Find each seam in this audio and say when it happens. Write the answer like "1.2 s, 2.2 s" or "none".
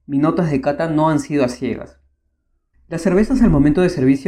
2.7 s